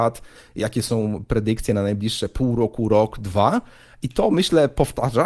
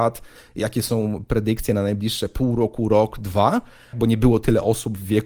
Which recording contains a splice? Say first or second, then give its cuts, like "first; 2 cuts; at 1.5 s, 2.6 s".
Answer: second; 1 cut; at 3.9 s